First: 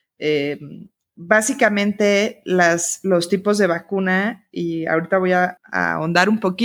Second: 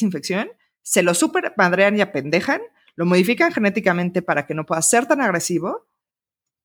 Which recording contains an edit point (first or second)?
first